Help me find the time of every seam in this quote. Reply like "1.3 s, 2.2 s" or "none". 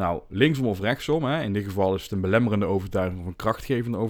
none